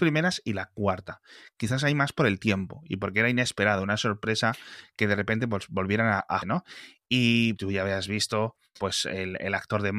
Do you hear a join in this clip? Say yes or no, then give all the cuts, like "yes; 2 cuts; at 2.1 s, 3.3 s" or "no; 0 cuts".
yes; 3 cuts; at 6.4 s, 7.5 s, 8.8 s